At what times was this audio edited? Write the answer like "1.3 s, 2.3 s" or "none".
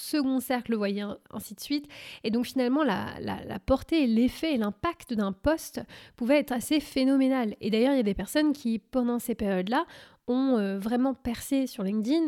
none